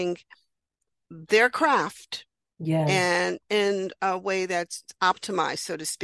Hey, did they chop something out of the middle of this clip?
no; 0 cuts

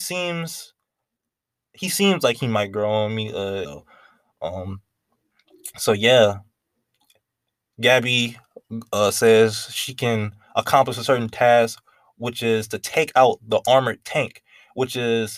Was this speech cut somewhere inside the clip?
yes; 1 cut; at 3.6 s

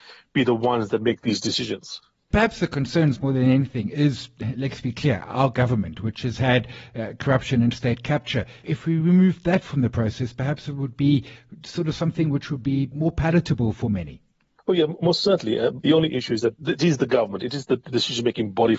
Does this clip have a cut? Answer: no; 0 cuts

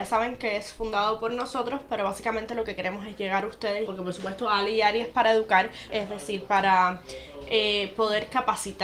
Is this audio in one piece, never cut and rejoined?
no; 2 cuts; at 3.9 s, 5.9 s

